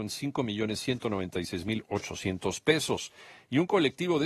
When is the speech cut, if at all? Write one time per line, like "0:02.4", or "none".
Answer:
none